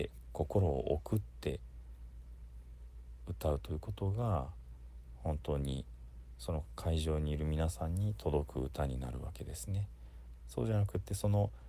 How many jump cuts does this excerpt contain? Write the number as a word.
one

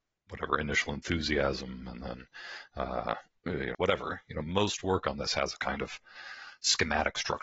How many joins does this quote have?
one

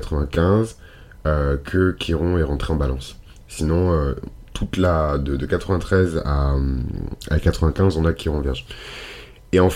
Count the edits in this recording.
zero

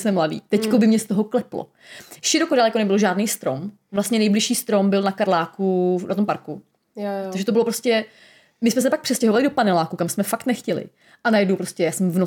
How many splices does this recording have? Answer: zero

